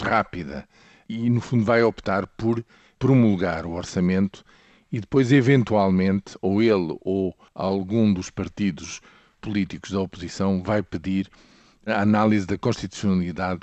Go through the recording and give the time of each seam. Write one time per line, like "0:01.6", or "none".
none